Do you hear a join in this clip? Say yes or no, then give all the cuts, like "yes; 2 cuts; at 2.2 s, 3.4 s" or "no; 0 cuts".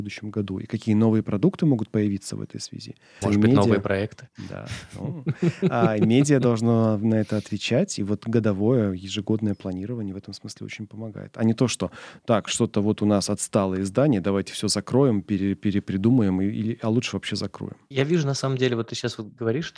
yes; 1 cut; at 3.2 s